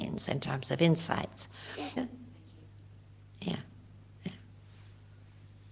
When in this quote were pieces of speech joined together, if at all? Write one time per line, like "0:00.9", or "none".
0:02.0